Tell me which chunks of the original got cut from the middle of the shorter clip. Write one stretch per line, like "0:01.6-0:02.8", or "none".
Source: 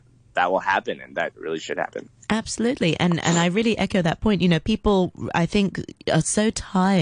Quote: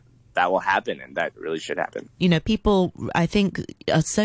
0:02.2-0:04.4